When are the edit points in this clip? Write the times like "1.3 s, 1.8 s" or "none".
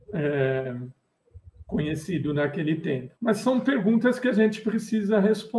3.2 s